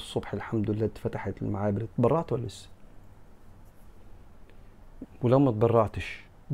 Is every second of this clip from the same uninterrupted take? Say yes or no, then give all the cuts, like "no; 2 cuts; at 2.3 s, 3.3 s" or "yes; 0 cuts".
no; 1 cut; at 5.0 s